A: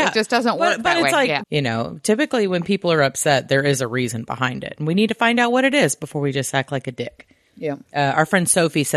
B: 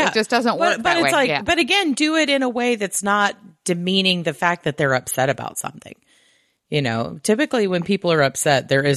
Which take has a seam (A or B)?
A